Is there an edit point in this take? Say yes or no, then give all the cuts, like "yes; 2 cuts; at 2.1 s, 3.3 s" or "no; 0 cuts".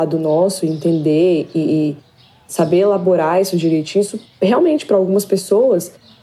no; 0 cuts